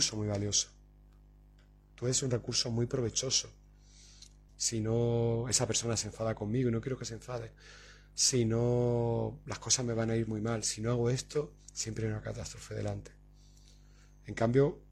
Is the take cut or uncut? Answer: cut